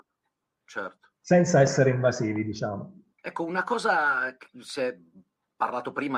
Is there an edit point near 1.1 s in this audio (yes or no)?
no